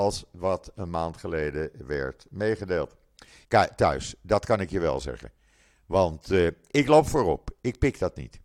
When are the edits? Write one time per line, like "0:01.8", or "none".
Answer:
0:03.4